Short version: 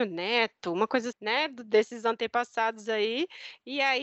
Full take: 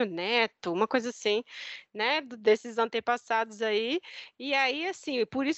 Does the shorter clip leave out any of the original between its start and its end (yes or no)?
yes